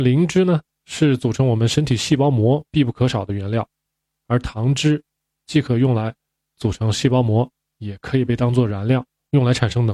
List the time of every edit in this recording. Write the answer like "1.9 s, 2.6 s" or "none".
none